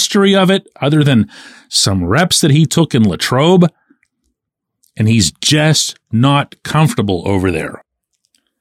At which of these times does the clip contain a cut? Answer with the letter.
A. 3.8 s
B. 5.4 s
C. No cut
C